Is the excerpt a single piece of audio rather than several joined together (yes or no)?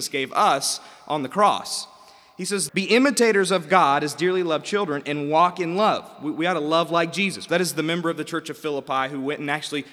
no